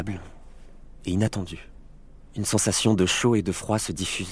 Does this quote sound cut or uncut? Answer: uncut